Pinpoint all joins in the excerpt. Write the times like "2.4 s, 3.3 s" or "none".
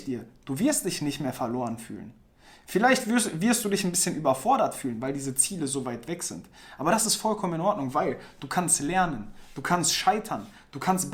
none